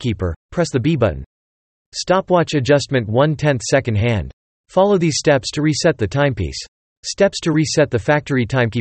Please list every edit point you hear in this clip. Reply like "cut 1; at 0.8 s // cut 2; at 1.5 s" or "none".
cut 1; at 4.6 s